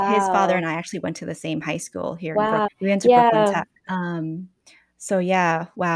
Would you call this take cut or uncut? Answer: cut